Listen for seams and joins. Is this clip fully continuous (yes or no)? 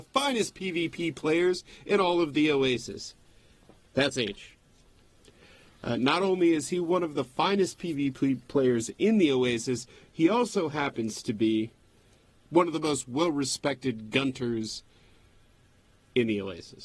yes